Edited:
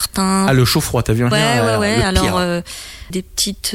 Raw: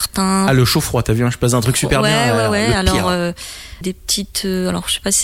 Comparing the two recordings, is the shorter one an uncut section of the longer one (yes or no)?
no